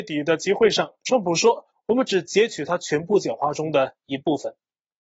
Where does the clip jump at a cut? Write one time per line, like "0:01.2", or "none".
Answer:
0:01.7